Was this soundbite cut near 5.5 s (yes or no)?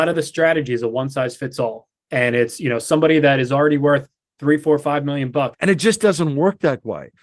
yes